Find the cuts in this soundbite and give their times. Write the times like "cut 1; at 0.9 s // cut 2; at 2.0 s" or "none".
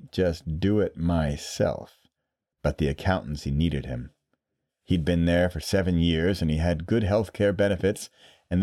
cut 1; at 2.5 s